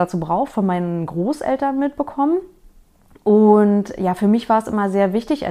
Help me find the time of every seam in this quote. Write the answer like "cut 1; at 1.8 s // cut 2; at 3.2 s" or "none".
none